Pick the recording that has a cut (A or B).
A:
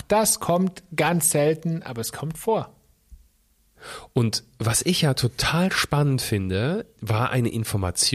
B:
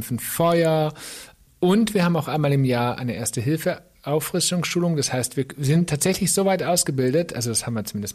A